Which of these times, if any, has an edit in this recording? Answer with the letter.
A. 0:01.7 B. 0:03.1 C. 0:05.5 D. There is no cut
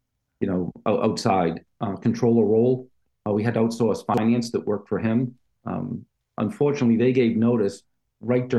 A